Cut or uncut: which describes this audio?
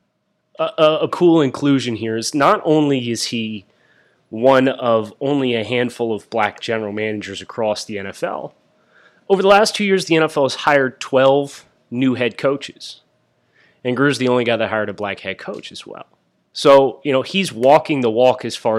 cut